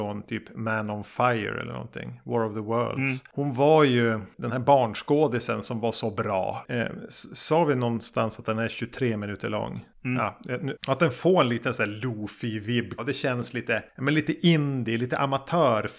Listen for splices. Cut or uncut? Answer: cut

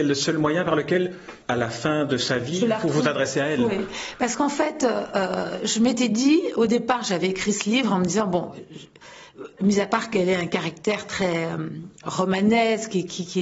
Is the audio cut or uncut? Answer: cut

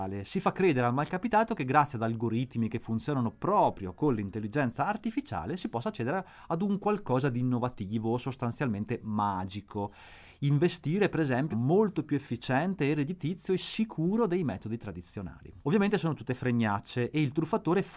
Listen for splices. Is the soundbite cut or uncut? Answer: cut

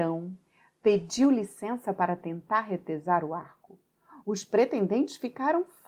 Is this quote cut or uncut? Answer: uncut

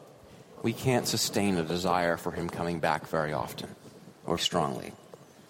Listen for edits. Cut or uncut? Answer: cut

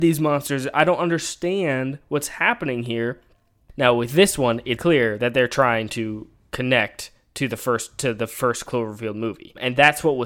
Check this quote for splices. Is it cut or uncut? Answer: cut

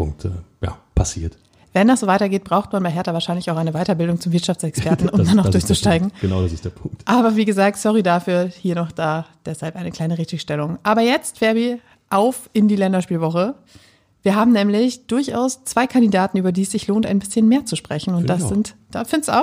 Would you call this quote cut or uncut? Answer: uncut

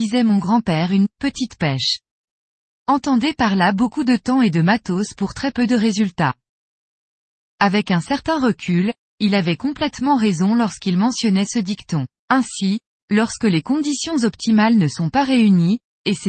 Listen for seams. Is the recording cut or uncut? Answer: cut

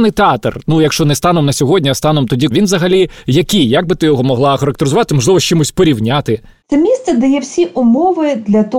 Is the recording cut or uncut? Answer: cut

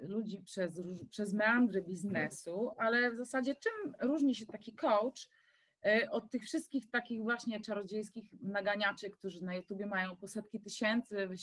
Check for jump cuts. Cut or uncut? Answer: uncut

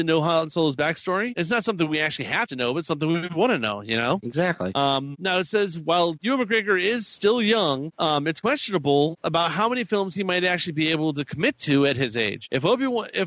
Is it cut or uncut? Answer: uncut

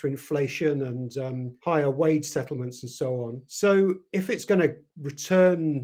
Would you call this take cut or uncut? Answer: uncut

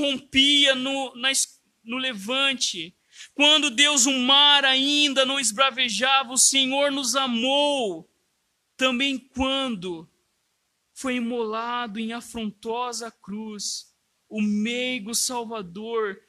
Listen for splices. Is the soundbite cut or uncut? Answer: uncut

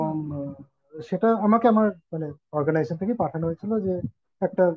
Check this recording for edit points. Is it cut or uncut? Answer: uncut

